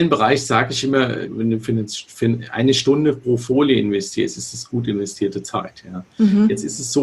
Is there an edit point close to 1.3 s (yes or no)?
yes